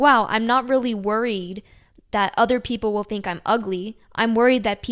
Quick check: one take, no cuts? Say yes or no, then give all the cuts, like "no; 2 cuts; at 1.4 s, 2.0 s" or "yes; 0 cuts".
yes; 0 cuts